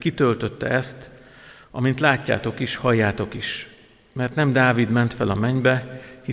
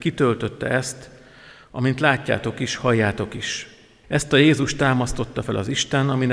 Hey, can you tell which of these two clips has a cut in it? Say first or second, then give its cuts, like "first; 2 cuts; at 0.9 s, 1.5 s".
second; 1 cut; at 4.0 s